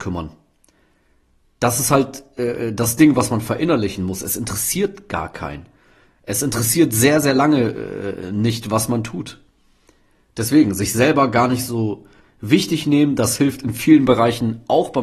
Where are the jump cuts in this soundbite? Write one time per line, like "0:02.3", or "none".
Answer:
none

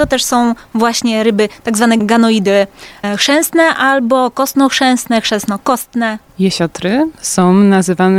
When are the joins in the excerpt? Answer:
0:06.3

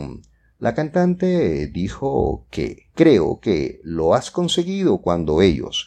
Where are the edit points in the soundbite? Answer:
0:02.9

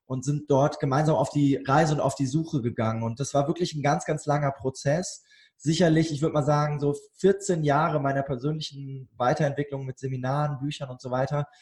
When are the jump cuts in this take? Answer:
none

